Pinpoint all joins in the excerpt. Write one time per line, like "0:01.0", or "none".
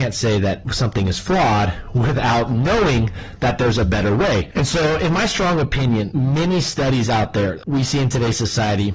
0:04.5

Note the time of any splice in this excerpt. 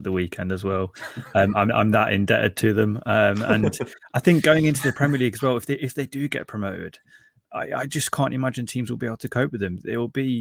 none

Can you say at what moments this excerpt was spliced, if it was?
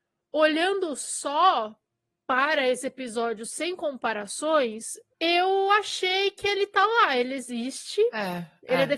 none

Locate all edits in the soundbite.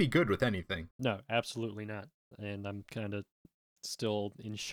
0:00.9

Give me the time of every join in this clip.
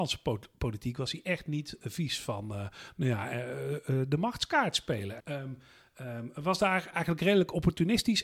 0:05.2

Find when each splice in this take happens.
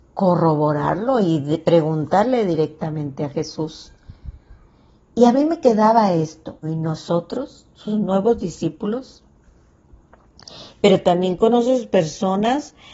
0:06.6
0:10.8

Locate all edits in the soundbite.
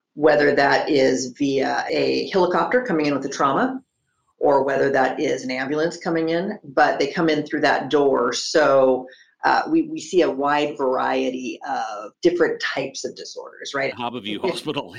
0:13.9

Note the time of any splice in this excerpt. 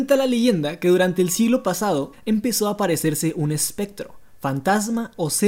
0:02.1

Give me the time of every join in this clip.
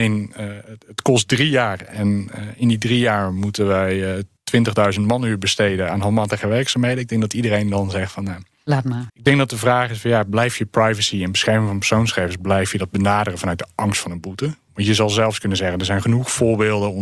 0:09.1

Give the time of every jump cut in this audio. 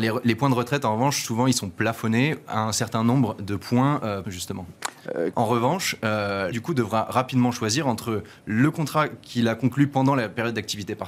0:04.2
0:05.3
0:06.5

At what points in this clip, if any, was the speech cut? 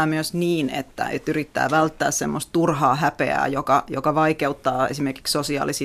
none

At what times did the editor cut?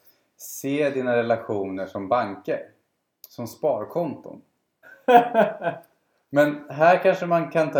0:04.8

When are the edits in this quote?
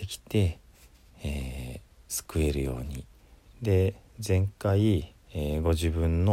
0:03.5

